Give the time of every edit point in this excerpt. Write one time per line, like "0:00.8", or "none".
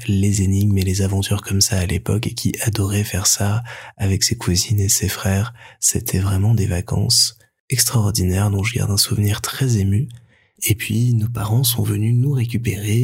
none